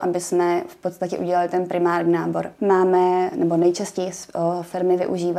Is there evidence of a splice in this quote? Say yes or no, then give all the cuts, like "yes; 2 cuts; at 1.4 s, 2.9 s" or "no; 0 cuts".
yes; 1 cut; at 2.5 s